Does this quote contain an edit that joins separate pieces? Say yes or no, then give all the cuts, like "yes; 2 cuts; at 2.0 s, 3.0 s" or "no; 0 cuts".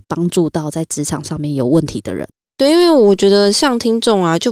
yes; 1 cut; at 2.5 s